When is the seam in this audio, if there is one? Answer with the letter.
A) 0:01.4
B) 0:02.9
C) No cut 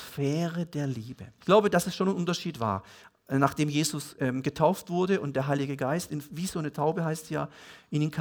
A